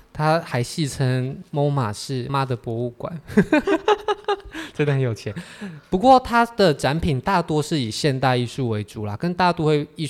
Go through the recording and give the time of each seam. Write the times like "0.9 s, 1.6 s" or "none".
2.3 s